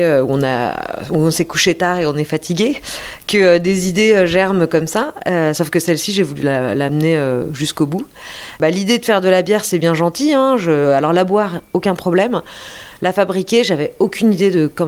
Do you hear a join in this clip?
no; 0 cuts

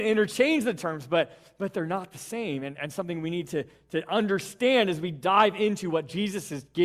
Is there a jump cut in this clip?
no; 0 cuts

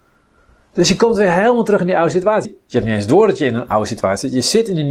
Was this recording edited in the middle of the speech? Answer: yes; 1 cut; at 2.4 s

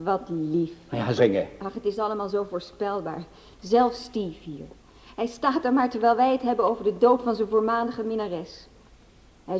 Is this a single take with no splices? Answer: no; 1 cut; at 1.2 s

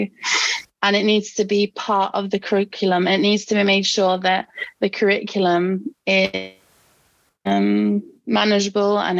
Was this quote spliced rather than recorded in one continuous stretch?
no; 0 cuts

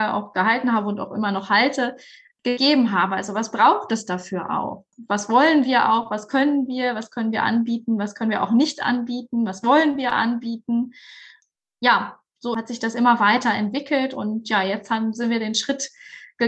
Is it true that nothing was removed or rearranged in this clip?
yes; 0 cuts

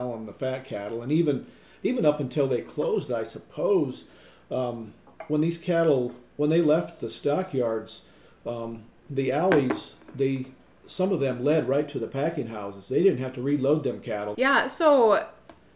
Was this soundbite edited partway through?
yes; 1 cut; at 14.3 s

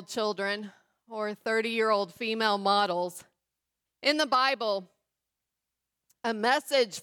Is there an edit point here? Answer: yes; 1 cut; at 3.9 s

